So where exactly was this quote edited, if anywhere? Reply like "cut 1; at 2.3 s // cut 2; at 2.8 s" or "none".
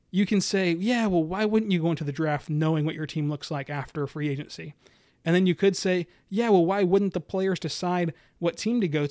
none